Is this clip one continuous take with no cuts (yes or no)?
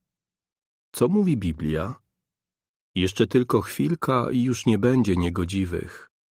yes